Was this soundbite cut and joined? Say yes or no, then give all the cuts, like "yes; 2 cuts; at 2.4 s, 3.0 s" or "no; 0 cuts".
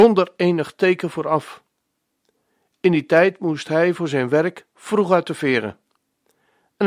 no; 0 cuts